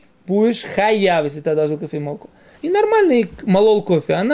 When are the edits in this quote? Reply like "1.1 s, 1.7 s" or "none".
2.5 s

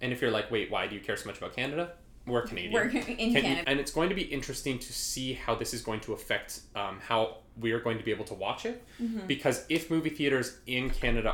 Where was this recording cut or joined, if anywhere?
3.6 s

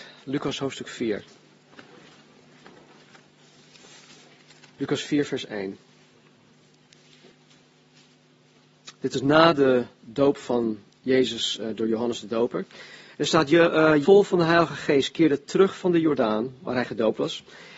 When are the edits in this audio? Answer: 14.0 s

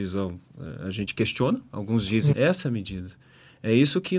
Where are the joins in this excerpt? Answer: 2.3 s

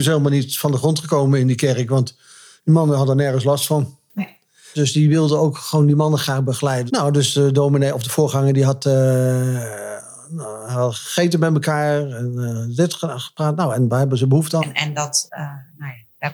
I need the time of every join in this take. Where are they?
4.7 s, 6.9 s, 14.6 s

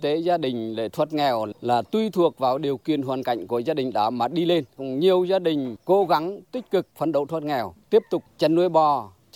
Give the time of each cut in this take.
none

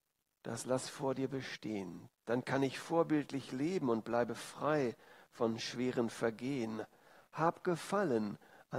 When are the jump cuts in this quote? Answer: 2.1 s

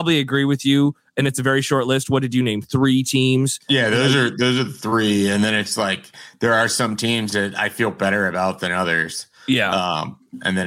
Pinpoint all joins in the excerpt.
none

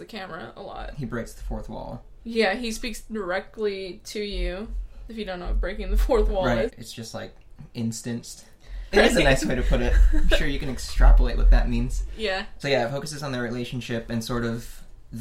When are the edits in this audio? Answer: 6.7 s, 8.9 s, 12.6 s

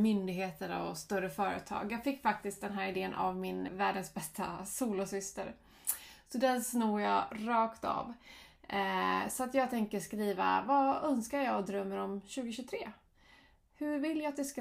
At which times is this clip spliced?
3.7 s

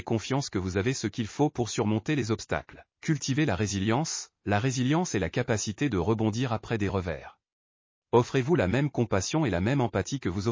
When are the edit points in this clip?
2.9 s, 7.9 s

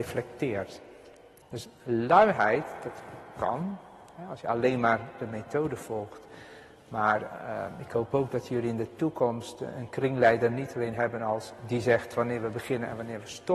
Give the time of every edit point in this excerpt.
1.4 s

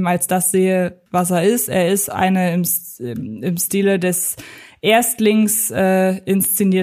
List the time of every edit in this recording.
1.1 s

